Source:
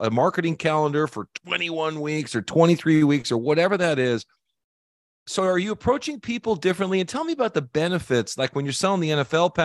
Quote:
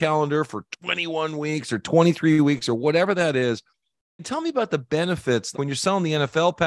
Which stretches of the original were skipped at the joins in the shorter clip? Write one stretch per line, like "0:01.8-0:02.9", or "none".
0:04.8-0:07.0
0:08.4-0:08.5